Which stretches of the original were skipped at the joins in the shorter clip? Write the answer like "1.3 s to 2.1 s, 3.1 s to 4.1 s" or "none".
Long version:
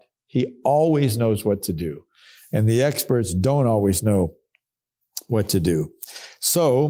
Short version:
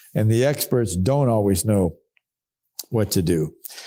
none